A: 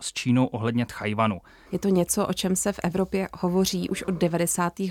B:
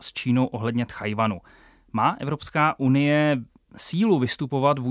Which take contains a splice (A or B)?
A